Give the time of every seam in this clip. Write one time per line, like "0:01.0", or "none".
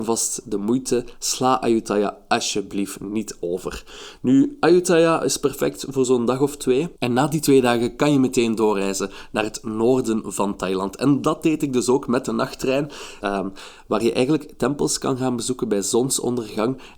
0:07.0
0:13.2